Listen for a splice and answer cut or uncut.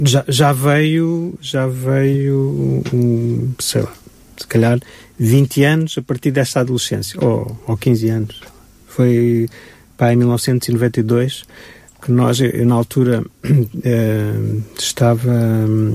uncut